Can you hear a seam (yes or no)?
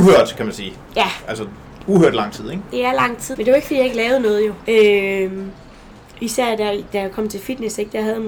yes